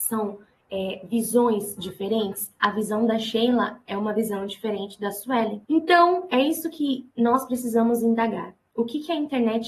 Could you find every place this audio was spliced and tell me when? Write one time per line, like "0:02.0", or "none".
0:05.6